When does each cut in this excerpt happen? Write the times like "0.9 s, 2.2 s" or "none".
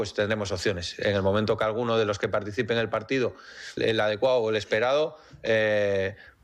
3.8 s